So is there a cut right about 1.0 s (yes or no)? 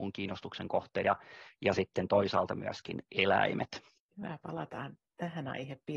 yes